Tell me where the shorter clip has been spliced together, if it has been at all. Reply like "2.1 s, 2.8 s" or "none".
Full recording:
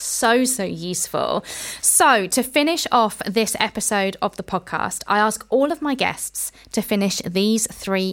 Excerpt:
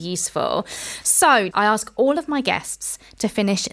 1.5 s